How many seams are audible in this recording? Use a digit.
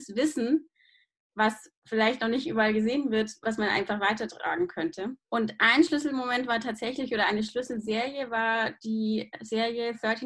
1